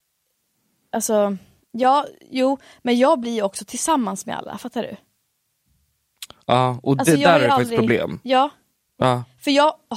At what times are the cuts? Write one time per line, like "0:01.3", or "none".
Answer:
none